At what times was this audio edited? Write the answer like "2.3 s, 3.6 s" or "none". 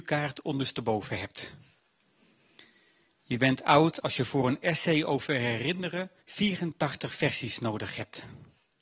6.2 s